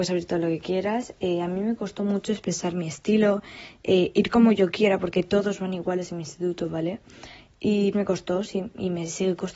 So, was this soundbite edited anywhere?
yes; 1 cut; at 7.9 s

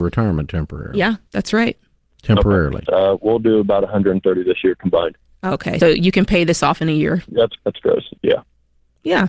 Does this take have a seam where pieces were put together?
yes; 3 cuts; at 2.9 s, 5.8 s, 7.6 s

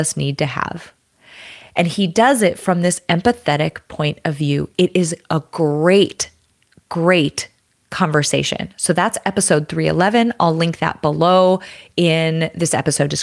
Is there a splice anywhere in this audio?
no; 0 cuts

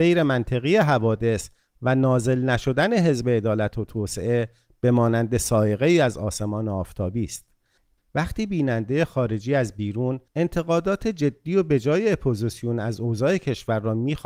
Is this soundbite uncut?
no; 2 cuts; at 8.0 s, 10.3 s

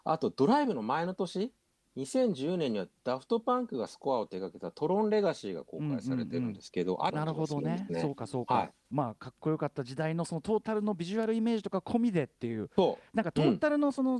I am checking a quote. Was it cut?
yes; 2 cuts; at 7.1 s, 8.9 s

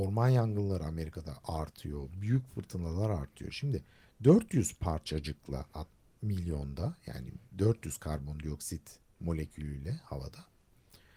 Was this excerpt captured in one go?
yes; 0 cuts

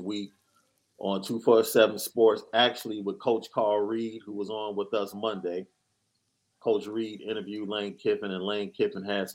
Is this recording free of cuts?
yes; 0 cuts

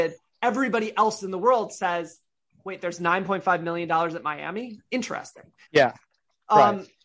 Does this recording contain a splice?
yes; 1 cut; at 5.6 s

